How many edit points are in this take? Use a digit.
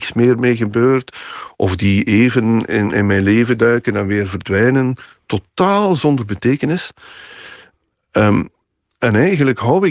0